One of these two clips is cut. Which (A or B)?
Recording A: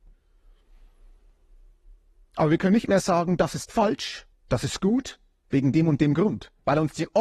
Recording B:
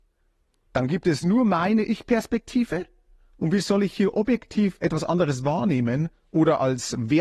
A